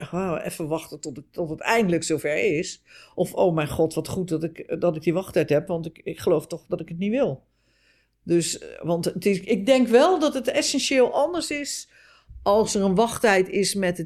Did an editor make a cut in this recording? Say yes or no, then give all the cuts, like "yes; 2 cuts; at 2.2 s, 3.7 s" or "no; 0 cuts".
no; 0 cuts